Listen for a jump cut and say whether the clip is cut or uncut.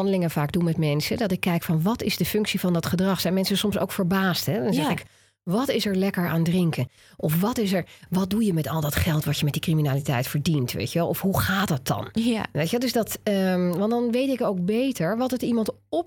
uncut